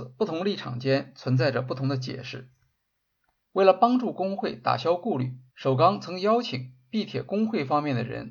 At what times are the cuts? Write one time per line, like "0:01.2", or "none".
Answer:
0:03.4
0:05.5